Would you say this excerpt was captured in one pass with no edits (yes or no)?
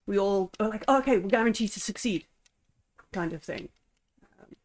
yes